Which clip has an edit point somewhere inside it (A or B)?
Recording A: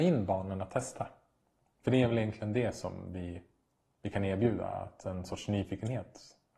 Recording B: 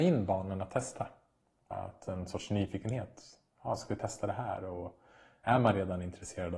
B